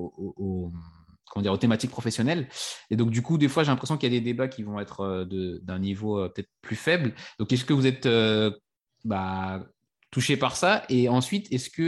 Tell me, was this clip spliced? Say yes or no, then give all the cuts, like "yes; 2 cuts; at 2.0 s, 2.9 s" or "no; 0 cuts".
no; 0 cuts